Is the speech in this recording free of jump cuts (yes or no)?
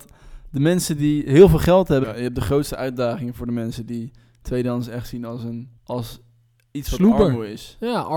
no